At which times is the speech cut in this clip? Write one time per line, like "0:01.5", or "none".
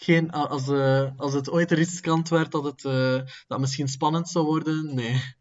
0:01.2